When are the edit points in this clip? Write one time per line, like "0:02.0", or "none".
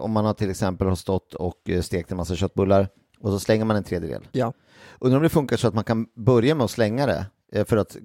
none